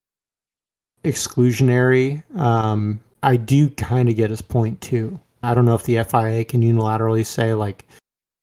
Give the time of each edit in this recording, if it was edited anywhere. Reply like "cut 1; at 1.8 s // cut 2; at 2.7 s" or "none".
cut 1; at 5.4 s